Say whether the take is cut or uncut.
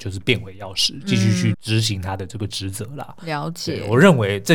cut